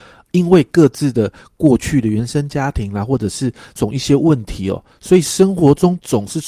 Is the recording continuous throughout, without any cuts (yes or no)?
no